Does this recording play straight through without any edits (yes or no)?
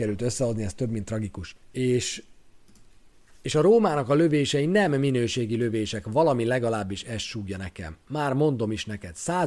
no